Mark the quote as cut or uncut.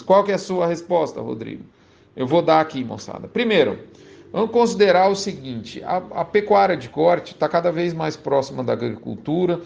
uncut